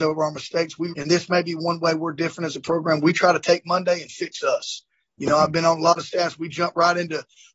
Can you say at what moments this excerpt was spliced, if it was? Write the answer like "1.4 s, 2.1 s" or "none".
0.9 s